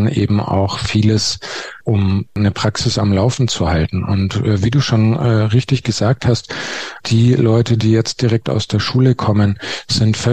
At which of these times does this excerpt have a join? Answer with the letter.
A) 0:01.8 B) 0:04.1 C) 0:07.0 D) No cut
A